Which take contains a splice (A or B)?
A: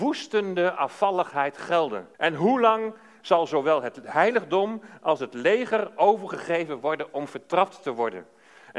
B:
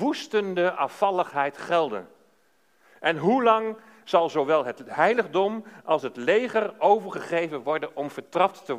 A